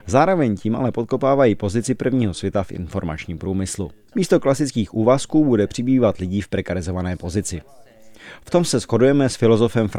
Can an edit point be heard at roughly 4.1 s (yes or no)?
yes